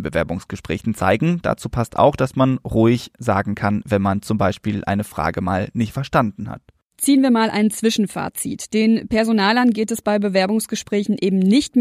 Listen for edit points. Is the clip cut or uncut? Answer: uncut